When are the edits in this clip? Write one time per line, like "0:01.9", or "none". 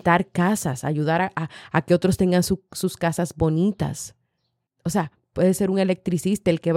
0:04.7